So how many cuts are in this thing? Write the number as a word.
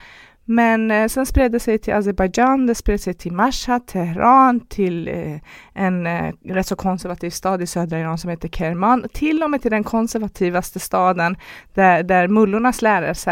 zero